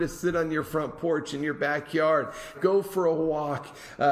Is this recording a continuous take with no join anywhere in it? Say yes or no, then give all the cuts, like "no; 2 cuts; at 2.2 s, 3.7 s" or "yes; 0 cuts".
no; 1 cut; at 2.5 s